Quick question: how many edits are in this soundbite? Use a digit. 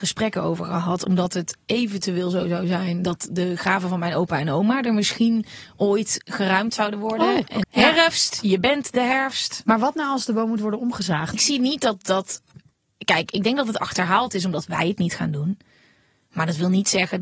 2